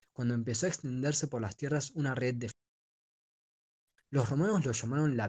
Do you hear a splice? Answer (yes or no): yes